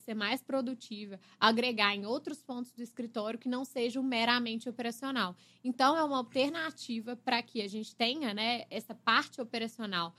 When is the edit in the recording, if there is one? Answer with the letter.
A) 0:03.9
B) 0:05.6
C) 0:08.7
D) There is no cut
D